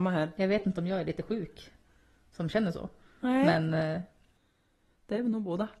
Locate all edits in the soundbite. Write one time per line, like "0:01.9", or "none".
none